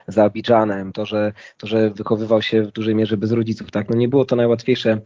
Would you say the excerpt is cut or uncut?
uncut